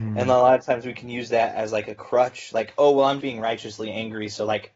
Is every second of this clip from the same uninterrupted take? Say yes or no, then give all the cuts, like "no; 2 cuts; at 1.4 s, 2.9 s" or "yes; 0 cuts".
no; 1 cut; at 3.2 s